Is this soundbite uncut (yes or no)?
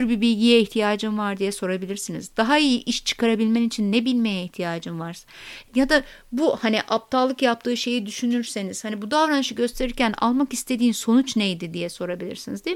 yes